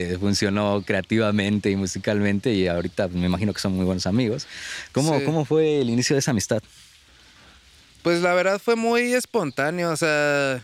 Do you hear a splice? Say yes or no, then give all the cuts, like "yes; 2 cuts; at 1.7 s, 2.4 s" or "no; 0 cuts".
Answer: no; 0 cuts